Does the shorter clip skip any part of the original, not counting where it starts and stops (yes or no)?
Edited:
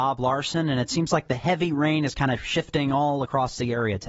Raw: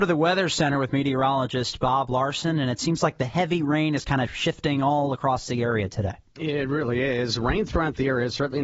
no